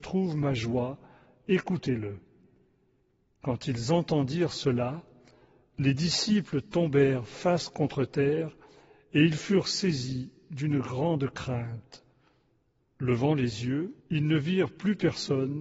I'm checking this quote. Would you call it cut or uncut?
cut